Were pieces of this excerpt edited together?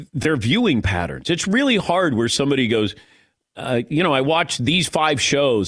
no; 0 cuts

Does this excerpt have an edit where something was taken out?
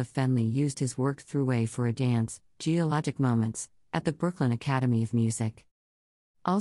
no; 0 cuts

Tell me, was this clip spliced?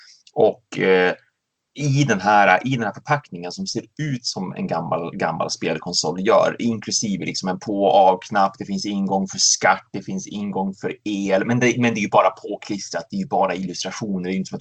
no; 0 cuts

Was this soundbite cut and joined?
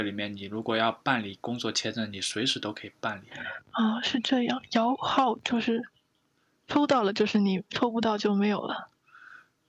no; 0 cuts

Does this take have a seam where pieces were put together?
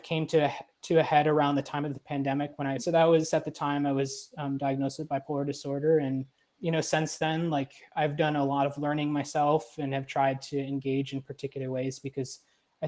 yes; 2 cuts; at 2.8 s, 6.6 s

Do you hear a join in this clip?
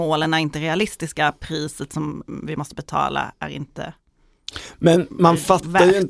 no; 0 cuts

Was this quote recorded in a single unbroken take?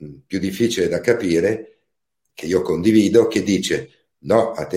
no; 1 cut; at 2.3 s

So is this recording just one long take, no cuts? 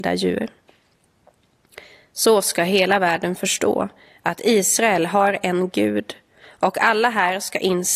yes; 0 cuts

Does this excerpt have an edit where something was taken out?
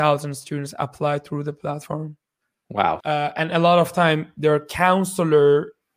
yes; 1 cut; at 3.0 s

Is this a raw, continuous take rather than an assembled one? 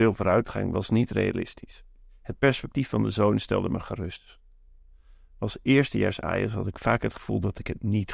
yes; 0 cuts

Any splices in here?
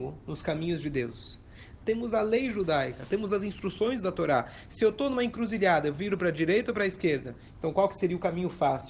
yes; 1 cut; at 1.8 s

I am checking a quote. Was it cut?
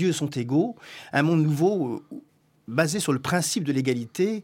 no; 0 cuts

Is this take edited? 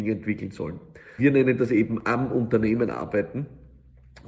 yes; 1 cut; at 1.2 s

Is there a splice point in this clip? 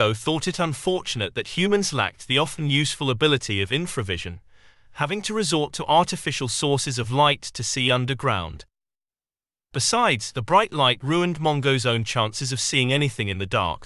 no; 0 cuts

